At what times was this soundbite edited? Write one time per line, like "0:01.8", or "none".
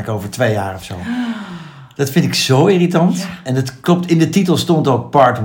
none